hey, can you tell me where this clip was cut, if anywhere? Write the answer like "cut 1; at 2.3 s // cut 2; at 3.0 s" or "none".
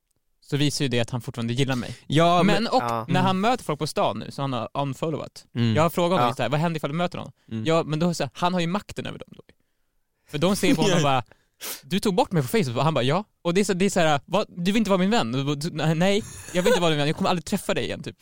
none